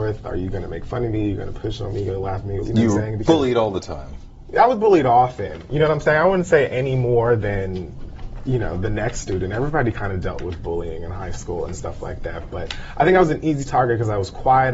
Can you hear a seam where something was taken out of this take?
yes; 1 cut; at 2.6 s

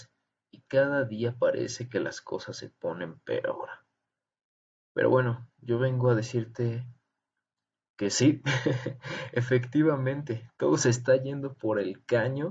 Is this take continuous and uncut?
yes; 0 cuts

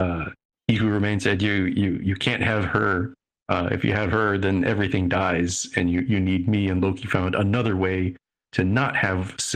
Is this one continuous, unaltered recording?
yes; 0 cuts

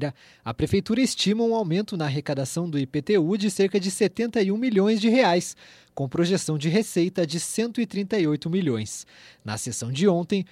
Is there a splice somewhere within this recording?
no; 0 cuts

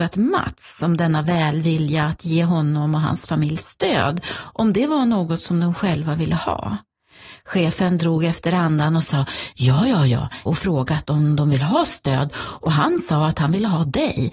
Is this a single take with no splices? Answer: no; 1 cut; at 10.5 s

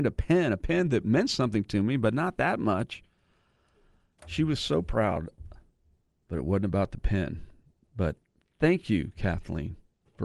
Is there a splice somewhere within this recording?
no; 0 cuts

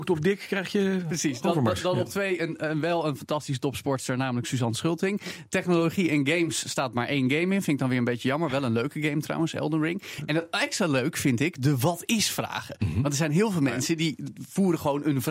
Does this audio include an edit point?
no; 0 cuts

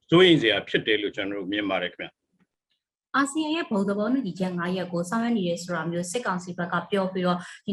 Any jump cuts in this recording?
no; 0 cuts

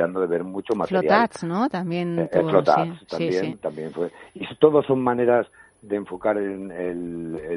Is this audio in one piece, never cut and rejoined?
yes; 0 cuts

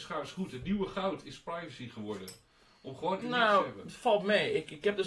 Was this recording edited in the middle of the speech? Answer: yes; 1 cut; at 3.2 s

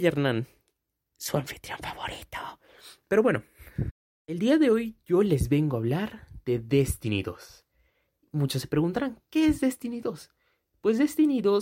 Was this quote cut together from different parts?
no; 0 cuts

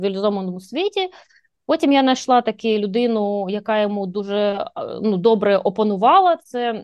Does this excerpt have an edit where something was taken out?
no; 0 cuts

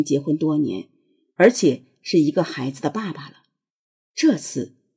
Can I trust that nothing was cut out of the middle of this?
yes; 0 cuts

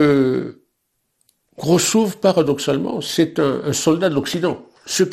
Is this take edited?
no; 0 cuts

